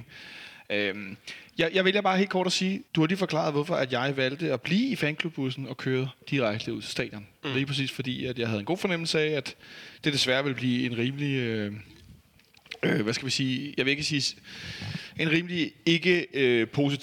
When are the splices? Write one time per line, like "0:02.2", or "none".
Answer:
0:02.9